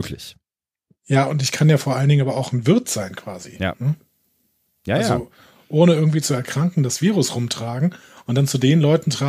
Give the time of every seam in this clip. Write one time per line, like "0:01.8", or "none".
none